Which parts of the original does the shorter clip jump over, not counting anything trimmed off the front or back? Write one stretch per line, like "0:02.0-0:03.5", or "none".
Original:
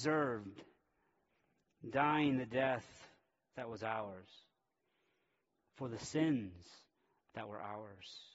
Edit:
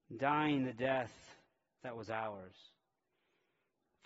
none